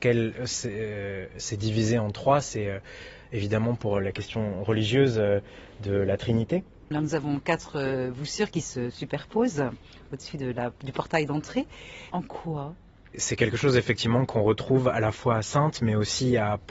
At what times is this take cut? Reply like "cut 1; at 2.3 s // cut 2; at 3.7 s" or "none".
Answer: cut 1; at 6.9 s // cut 2; at 12.1 s